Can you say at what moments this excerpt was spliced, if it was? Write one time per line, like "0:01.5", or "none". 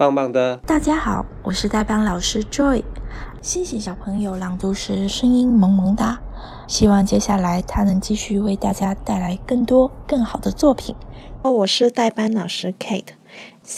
0:06.7
0:11.4